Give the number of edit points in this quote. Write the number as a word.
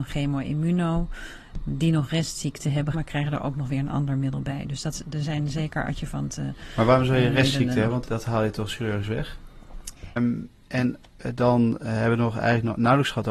three